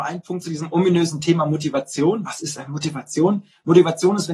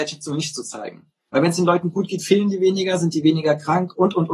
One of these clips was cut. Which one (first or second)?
second